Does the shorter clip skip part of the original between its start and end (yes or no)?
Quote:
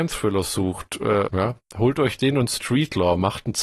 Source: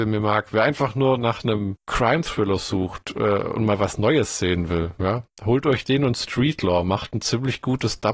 yes